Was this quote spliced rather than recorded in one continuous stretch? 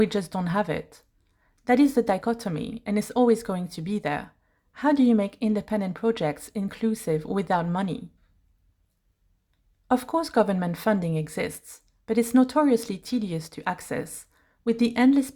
no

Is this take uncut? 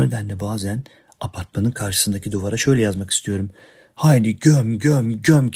yes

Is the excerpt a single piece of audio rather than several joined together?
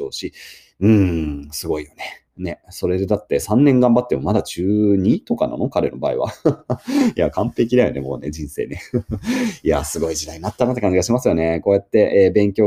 yes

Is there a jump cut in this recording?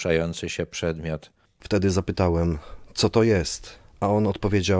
no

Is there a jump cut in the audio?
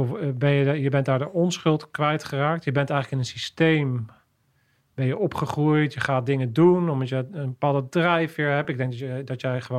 no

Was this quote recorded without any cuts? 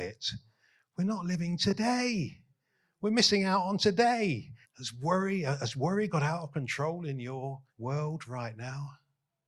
no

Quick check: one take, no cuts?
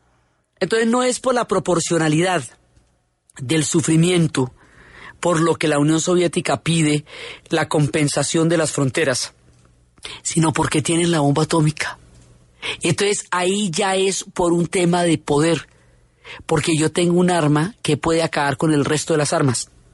yes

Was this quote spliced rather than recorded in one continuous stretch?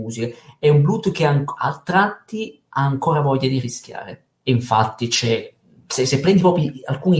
yes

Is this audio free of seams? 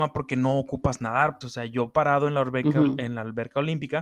no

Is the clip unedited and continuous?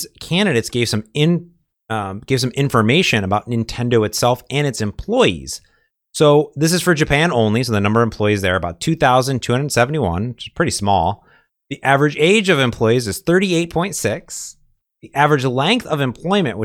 yes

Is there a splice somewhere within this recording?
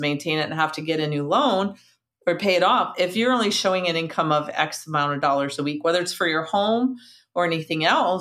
no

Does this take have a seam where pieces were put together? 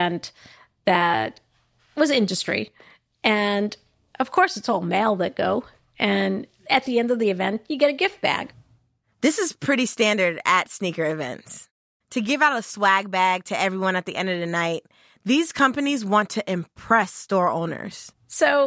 no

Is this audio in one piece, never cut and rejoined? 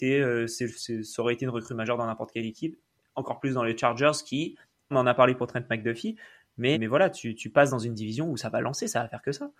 no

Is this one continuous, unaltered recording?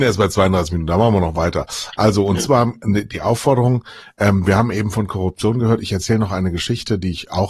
yes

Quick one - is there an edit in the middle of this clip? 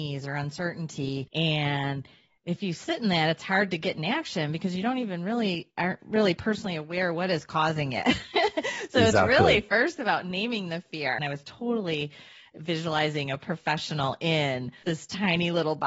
yes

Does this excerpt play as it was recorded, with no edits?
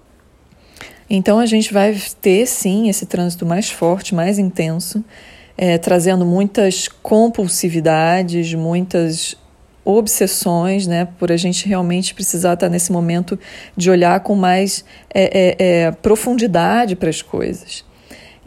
yes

